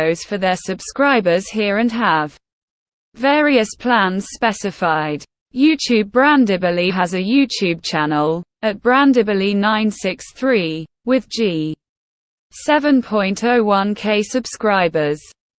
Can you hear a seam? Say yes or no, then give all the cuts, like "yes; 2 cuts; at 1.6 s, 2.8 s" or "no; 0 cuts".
yes; 1 cut; at 6.9 s